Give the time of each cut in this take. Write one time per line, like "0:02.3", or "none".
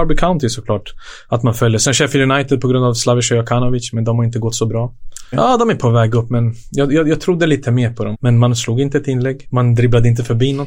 0:05.3
0:08.1
0:09.4